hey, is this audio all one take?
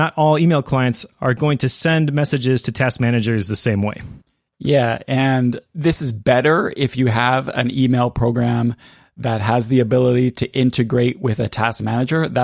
yes; 0 cuts

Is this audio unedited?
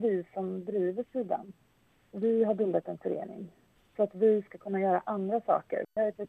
yes; 0 cuts

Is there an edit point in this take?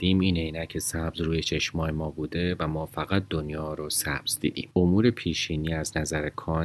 yes; 1 cut; at 4.7 s

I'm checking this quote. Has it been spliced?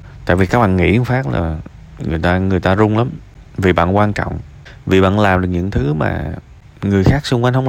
no; 0 cuts

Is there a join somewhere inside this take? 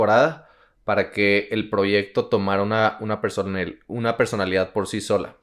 no; 0 cuts

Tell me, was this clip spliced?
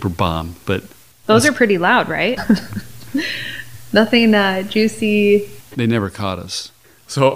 yes; 2 cuts; at 2.4 s, 5.7 s

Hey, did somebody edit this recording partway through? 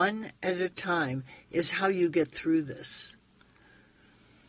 no; 0 cuts

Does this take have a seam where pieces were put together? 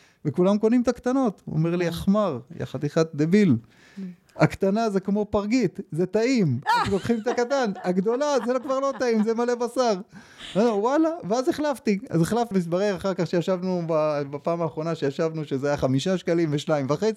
yes; 1 cut; at 12.5 s

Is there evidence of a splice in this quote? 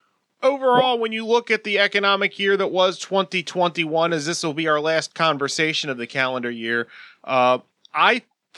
no; 0 cuts

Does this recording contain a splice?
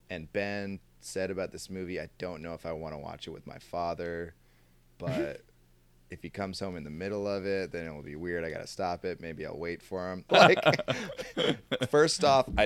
yes; 1 cut; at 10.3 s

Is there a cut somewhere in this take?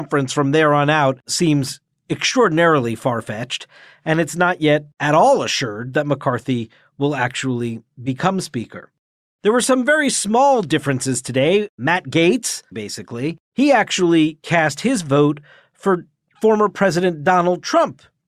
yes; 1 cut; at 12.7 s

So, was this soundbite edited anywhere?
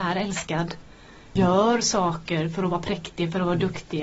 yes; 1 cut; at 1.4 s

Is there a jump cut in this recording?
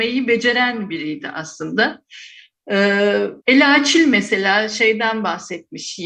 yes; 1 cut; at 3.4 s

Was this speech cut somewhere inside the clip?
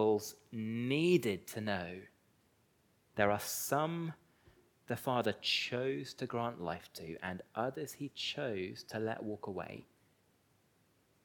yes; 1 cut; at 3.0 s

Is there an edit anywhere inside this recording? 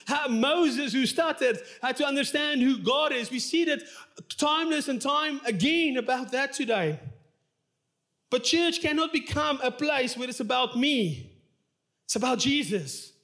no; 0 cuts

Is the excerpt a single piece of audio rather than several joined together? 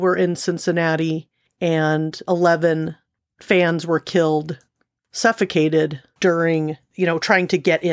yes; 0 cuts

